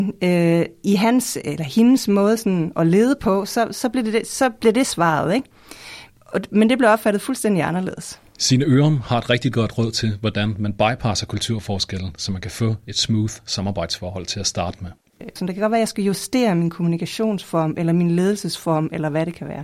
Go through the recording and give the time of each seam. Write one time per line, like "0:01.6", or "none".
0:15.4